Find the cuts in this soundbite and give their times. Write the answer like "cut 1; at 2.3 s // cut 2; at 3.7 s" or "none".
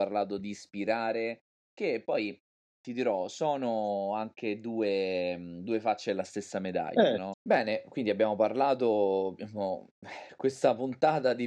cut 1; at 7.3 s